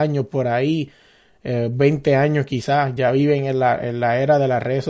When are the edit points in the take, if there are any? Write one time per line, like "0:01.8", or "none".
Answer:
none